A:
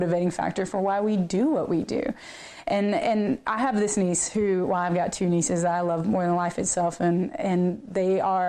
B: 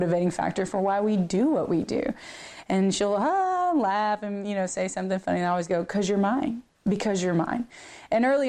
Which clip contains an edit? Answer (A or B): B